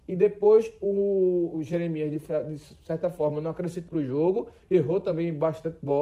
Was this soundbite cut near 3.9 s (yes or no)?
yes